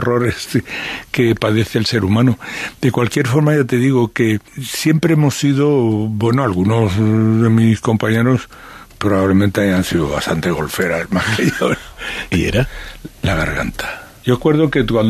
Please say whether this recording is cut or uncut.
cut